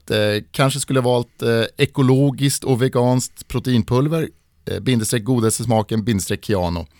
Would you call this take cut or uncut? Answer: uncut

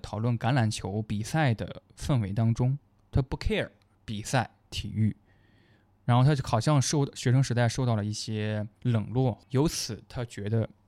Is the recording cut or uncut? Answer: cut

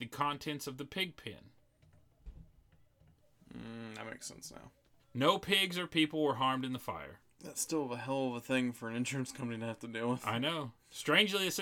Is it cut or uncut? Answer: cut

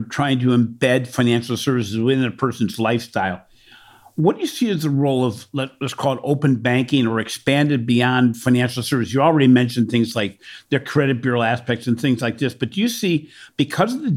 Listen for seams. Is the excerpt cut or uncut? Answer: uncut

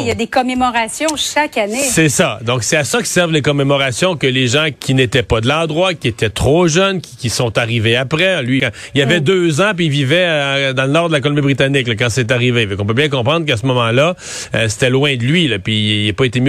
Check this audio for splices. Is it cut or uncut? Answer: cut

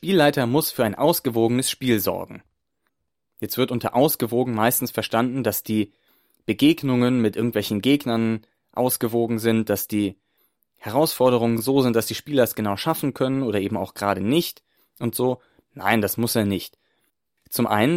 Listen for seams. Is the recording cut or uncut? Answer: uncut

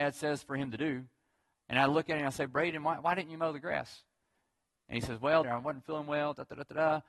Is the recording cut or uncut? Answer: cut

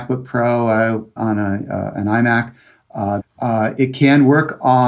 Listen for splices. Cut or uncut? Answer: cut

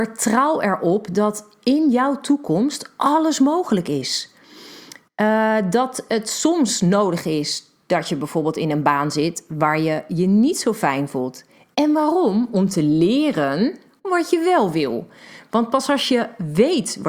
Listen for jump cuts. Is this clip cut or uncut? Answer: uncut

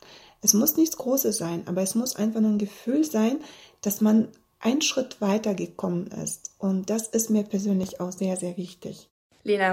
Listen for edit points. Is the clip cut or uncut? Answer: uncut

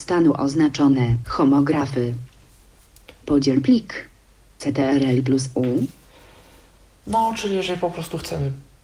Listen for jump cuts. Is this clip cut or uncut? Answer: cut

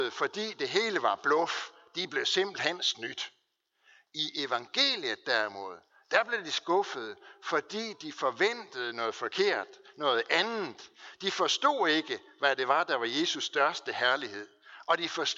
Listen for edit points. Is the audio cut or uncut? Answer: uncut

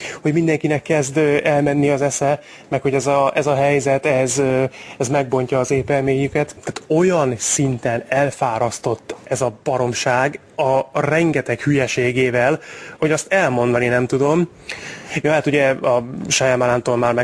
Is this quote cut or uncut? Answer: cut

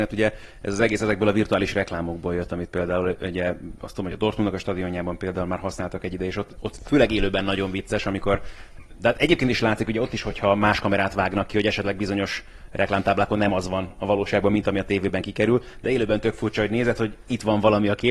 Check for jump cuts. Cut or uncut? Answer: uncut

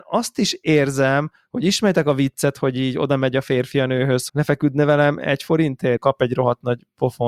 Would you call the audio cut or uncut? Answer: cut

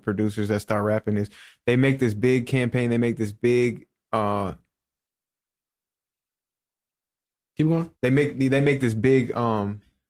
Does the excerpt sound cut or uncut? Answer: cut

